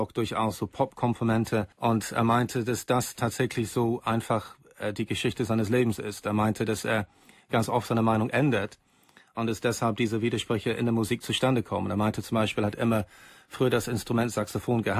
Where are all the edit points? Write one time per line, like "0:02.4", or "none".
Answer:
0:01.7